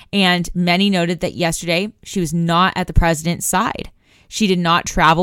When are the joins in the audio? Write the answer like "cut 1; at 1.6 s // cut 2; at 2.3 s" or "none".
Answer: none